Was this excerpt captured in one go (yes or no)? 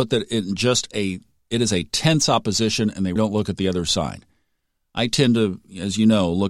no